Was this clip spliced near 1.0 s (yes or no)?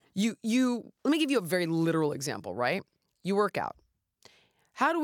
yes